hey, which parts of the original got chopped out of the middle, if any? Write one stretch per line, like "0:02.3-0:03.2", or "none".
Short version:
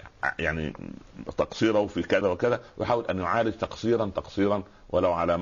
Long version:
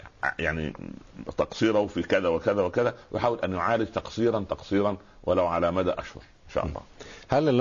0:02.2-0:02.6